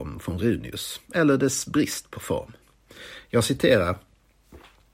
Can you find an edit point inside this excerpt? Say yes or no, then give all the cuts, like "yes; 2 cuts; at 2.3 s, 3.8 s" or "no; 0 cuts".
no; 0 cuts